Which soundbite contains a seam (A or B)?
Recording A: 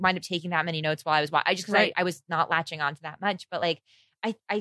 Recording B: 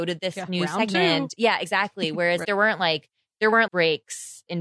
B